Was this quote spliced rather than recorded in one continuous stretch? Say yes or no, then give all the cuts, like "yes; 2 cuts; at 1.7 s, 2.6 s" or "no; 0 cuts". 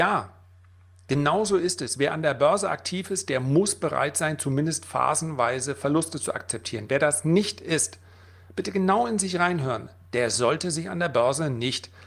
no; 0 cuts